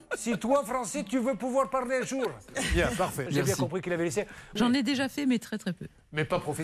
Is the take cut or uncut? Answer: cut